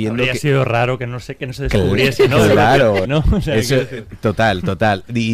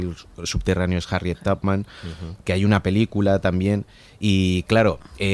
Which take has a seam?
first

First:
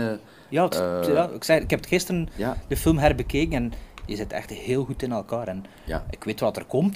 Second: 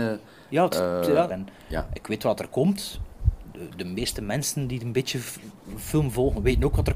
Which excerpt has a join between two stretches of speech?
second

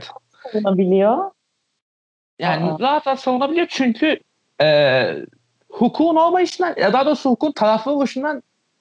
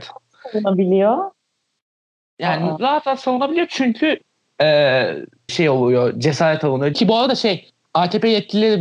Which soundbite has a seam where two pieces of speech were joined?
second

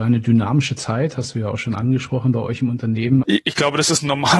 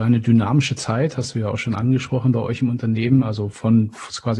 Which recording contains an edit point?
first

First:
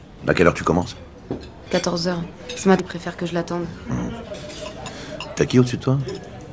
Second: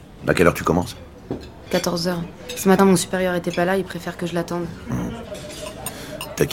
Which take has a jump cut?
first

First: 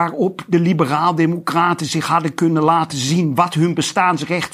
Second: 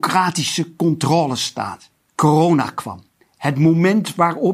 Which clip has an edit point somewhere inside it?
second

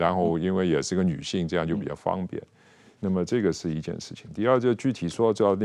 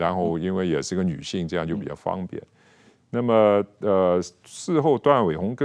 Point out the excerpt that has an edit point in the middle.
first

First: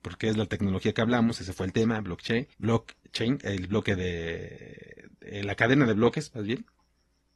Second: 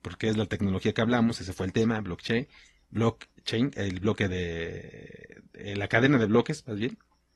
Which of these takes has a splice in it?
first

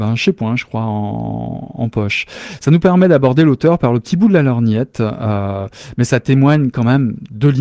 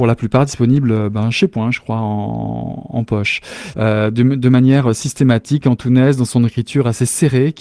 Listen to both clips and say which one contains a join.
second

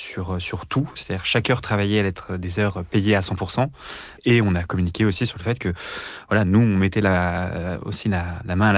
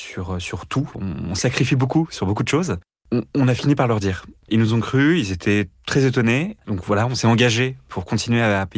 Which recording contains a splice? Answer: second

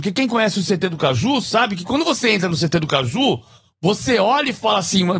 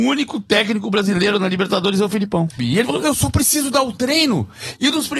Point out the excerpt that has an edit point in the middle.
second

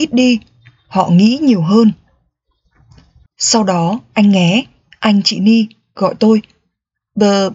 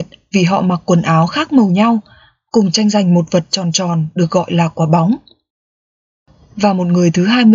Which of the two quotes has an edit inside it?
first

